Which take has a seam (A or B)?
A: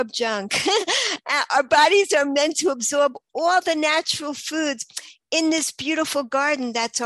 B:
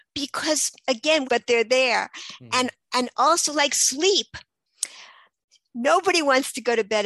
B